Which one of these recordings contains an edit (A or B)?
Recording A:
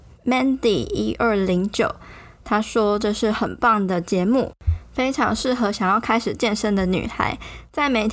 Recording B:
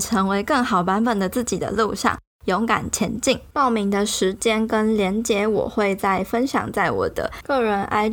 B